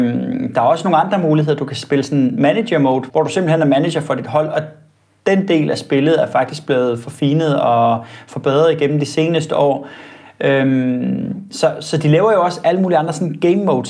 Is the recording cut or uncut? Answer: cut